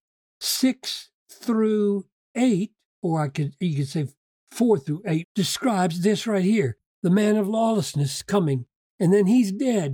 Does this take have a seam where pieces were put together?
yes; 1 cut; at 5.2 s

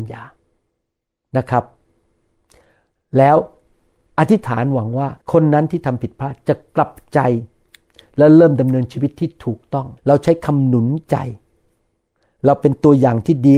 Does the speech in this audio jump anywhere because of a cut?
yes; 2 cuts; at 5.2 s, 10.0 s

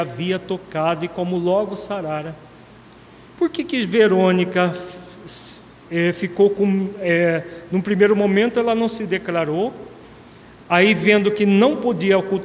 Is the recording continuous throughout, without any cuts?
yes; 0 cuts

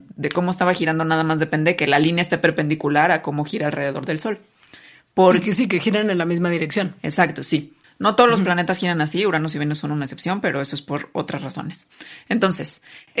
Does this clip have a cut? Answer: yes; 1 cut; at 7.8 s

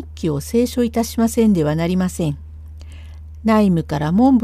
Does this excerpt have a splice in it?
no; 0 cuts

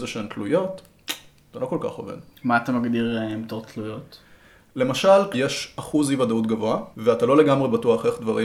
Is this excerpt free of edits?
no; 2 cuts; at 5.3 s, 6.9 s

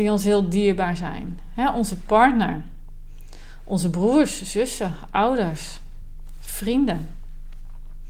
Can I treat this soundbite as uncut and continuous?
yes; 0 cuts

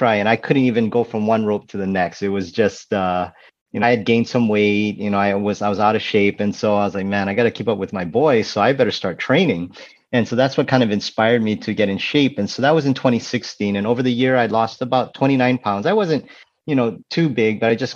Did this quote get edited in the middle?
yes; 1 cut; at 3.8 s

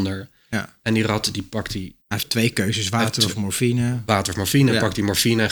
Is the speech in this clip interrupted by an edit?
yes; 1 cut; at 2.0 s

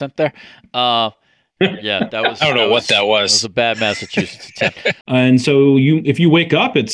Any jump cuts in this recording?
yes; 1 cut; at 5.0 s

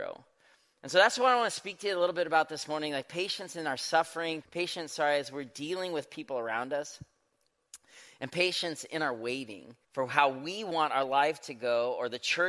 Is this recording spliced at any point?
yes; 2 cuts; at 4.4 s, 9.8 s

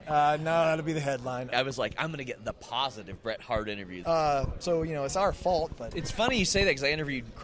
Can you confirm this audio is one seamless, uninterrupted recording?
no; 3 cuts; at 1.5 s, 4.0 s, 5.9 s

